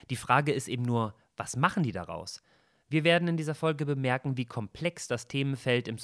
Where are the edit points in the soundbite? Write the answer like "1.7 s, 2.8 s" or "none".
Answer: none